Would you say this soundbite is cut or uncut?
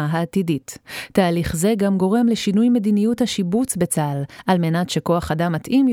uncut